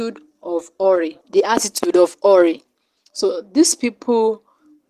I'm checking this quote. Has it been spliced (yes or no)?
yes